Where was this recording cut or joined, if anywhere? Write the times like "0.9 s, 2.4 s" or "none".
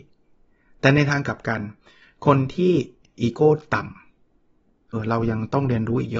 4.9 s